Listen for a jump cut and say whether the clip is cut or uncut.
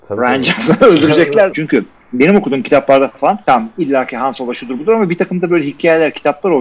cut